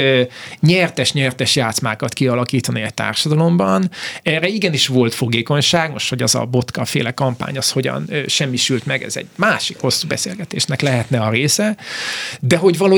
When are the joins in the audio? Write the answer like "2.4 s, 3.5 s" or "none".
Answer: none